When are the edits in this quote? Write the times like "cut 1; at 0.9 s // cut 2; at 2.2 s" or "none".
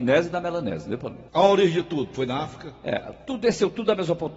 cut 1; at 1.3 s